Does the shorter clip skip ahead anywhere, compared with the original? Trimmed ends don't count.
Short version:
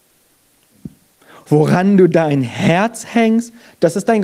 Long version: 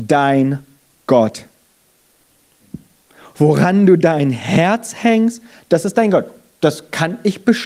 no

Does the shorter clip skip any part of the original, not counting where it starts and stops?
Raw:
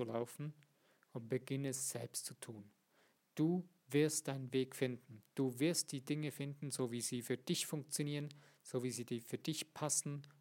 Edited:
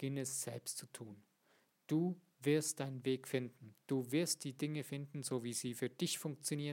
no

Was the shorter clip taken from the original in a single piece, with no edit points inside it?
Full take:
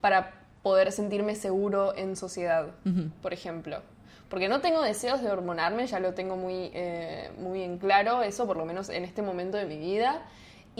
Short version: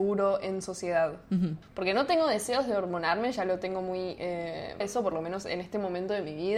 no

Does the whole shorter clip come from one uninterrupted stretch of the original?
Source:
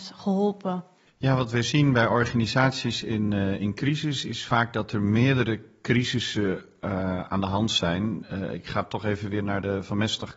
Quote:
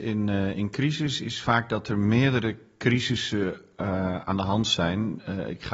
yes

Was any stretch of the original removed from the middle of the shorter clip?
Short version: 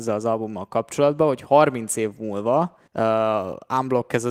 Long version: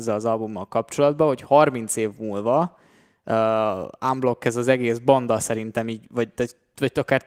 yes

